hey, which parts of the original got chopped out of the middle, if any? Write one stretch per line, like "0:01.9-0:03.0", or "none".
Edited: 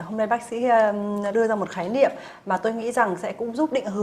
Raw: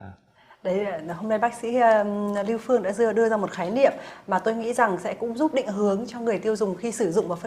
0:02.4-0:03.1